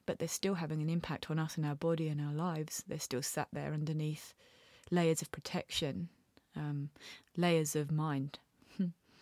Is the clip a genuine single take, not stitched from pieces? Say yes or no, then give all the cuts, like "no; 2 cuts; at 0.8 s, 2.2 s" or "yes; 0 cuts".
yes; 0 cuts